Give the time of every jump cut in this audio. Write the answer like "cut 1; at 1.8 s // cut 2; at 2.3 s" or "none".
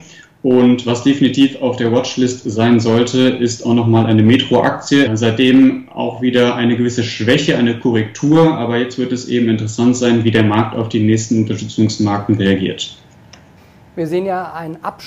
cut 1; at 5.1 s